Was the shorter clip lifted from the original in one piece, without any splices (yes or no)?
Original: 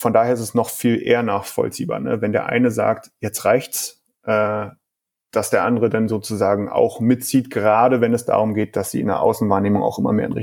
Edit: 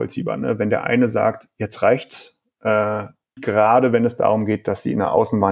no